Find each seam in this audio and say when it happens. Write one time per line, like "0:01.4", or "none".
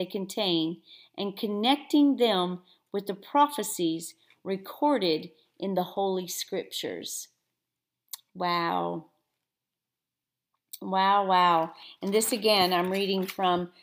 none

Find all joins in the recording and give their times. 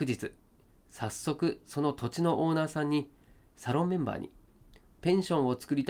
none

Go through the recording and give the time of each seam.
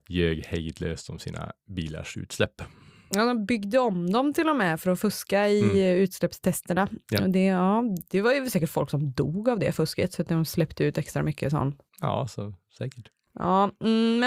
none

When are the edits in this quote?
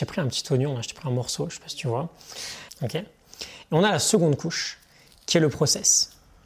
0:02.7

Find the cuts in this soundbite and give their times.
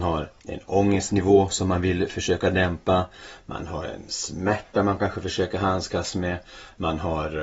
none

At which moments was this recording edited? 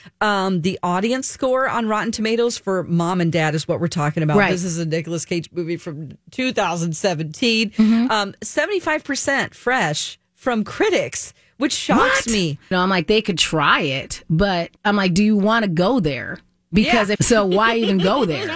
0:12.7
0:14.8
0:17.2

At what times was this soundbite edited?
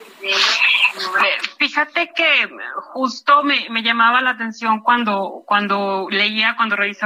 none

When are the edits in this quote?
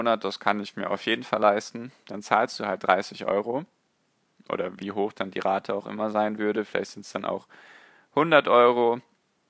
none

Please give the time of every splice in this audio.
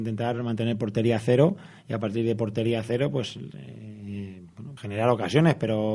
0:04.8

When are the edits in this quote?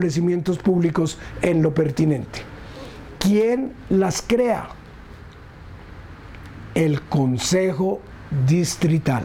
none

